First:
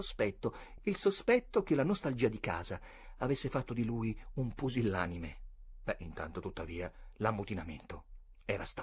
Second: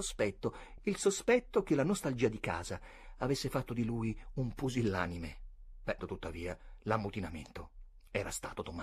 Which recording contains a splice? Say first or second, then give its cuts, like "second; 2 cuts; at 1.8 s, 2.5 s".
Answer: second; 1 cut; at 6.0 s